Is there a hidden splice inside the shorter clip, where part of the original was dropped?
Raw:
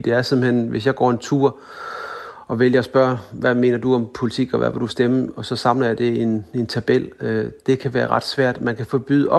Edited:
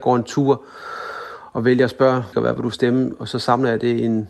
yes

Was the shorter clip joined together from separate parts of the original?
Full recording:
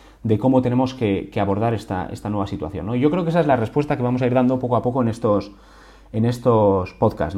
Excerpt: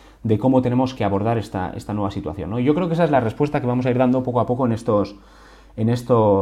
yes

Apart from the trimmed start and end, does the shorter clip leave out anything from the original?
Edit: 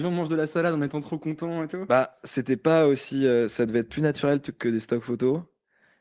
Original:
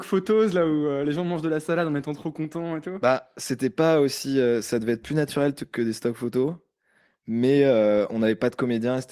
no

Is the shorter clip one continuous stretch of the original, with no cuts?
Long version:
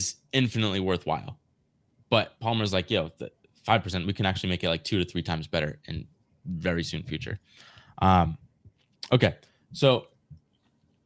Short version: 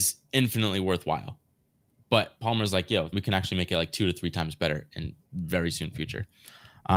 no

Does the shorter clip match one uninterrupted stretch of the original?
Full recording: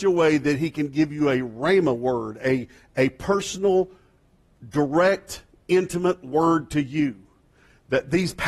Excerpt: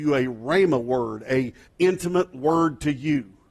no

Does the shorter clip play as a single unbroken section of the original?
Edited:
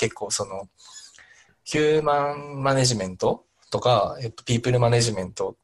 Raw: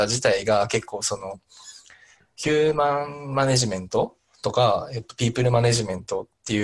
yes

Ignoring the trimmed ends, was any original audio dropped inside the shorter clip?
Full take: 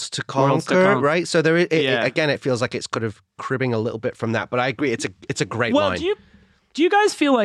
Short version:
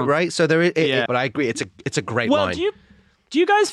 yes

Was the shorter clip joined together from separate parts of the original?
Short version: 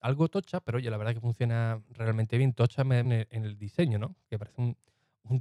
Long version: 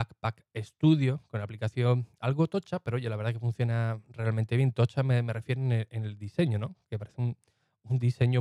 yes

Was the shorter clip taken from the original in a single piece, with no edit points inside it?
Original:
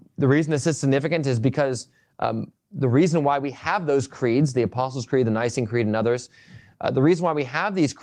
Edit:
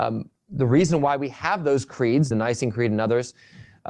no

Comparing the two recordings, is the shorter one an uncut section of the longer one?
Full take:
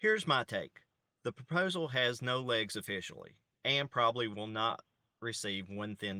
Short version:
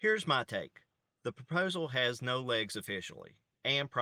yes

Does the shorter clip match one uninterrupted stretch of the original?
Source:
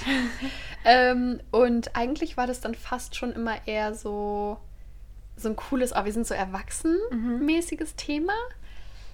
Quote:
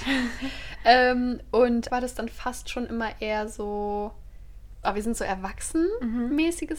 no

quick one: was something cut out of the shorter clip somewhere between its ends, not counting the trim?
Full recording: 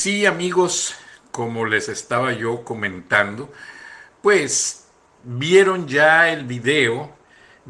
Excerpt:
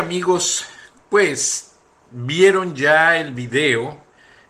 yes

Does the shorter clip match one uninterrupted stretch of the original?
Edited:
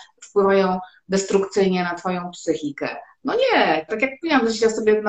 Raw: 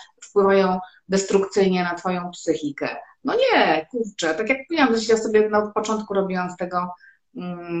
no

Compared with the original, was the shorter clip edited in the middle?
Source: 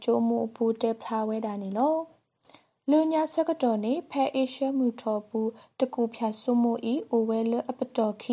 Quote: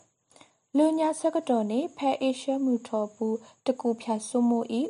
no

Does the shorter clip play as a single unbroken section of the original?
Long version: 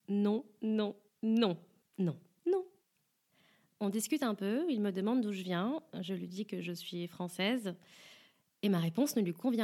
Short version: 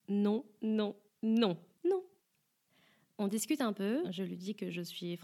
no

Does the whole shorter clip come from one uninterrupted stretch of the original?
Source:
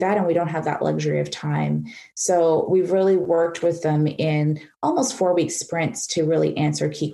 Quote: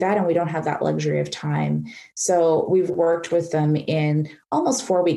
no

